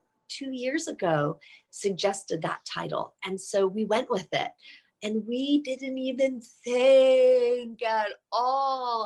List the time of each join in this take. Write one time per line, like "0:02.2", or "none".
none